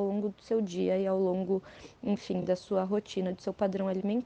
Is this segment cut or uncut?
uncut